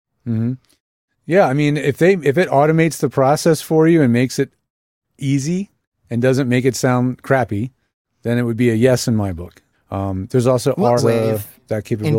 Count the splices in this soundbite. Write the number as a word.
two